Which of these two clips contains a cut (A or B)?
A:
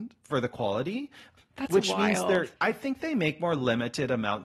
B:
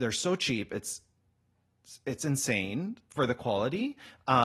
A